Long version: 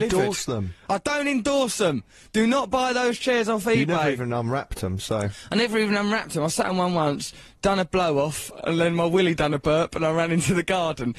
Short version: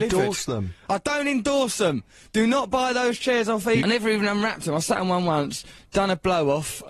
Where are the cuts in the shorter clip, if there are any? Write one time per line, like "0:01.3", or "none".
0:03.8